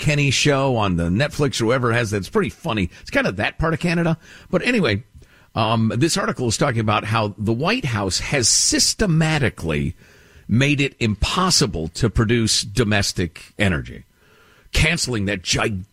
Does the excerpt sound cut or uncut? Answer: uncut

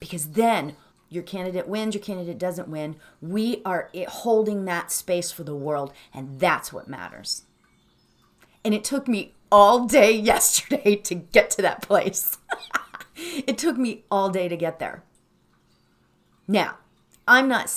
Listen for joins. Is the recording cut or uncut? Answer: cut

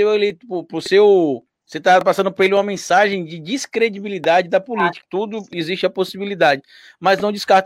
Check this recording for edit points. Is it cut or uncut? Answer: cut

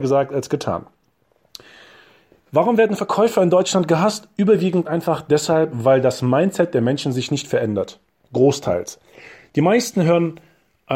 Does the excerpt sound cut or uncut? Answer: uncut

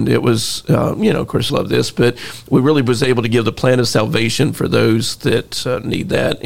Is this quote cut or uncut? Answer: cut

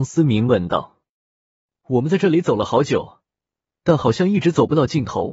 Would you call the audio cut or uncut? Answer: uncut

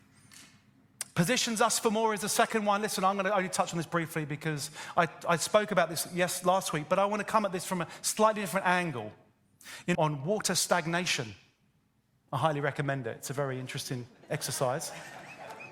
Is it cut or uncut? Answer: cut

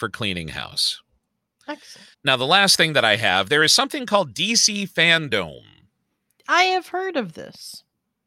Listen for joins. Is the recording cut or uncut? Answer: cut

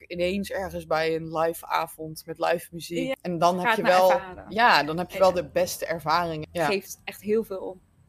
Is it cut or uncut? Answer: cut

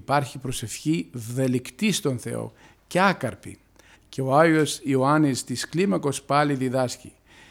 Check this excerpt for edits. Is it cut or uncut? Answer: cut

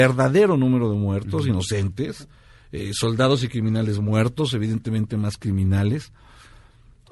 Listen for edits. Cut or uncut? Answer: uncut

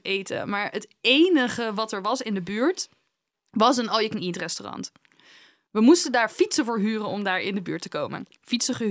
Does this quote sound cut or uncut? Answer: uncut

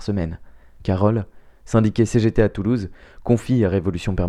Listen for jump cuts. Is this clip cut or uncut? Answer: uncut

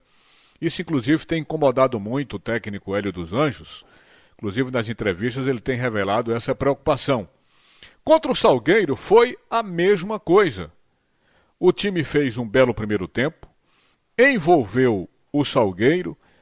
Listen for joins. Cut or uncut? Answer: uncut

